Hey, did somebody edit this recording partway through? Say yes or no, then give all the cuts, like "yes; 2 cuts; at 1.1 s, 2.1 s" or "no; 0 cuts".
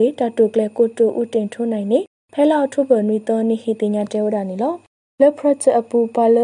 no; 0 cuts